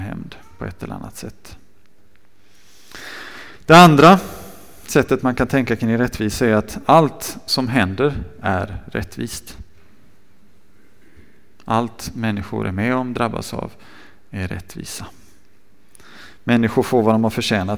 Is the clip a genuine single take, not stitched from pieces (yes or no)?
yes